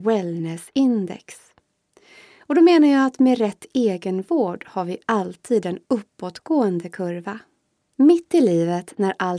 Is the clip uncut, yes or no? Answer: no